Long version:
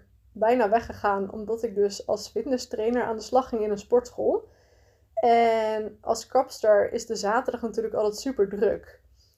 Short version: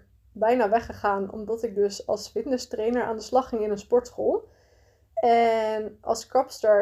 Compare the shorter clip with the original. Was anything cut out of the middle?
no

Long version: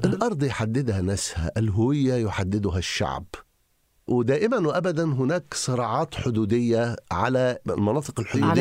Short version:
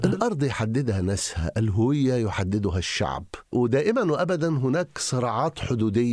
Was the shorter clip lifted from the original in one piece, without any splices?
no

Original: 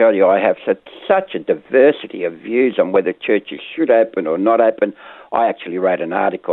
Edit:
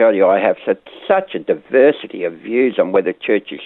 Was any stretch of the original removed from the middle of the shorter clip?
no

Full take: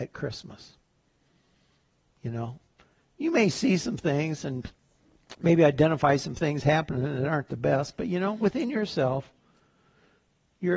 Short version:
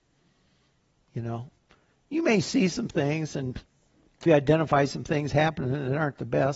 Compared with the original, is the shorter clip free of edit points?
no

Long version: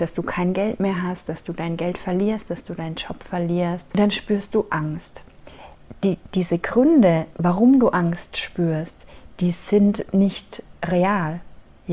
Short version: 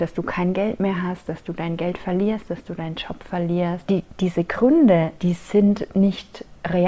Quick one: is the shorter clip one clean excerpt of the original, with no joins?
no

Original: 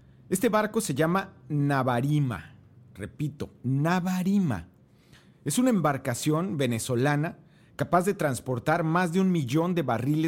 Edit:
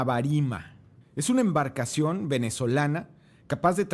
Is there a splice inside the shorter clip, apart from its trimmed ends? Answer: yes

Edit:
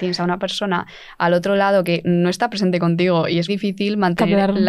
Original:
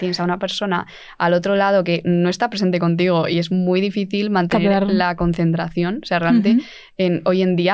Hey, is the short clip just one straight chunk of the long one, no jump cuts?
no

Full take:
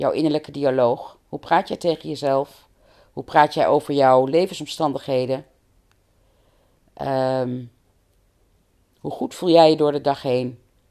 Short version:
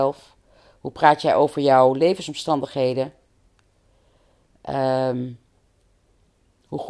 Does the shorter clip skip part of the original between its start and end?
no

